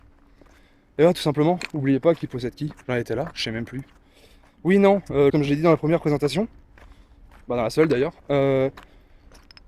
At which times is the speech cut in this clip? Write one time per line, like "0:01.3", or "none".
0:05.3
0:08.2